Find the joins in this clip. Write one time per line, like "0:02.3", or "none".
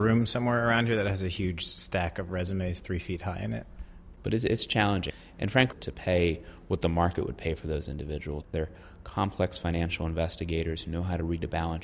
0:04.1
0:05.7
0:08.4